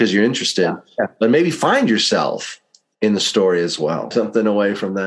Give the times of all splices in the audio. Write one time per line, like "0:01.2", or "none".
0:04.1